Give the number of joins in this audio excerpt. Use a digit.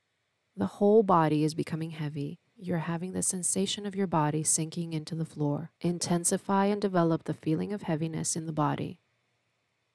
2